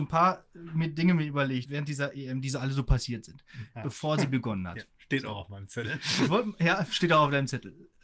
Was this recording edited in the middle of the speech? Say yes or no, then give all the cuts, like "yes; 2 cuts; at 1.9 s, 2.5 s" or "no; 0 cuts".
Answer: yes; 2 cuts; at 1.7 s, 3.7 s